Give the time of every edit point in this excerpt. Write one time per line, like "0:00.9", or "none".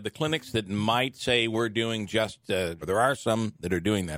0:02.8